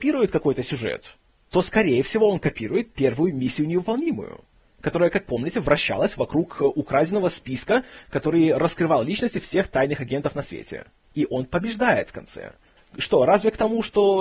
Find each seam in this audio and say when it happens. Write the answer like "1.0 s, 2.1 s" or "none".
11.0 s, 12.8 s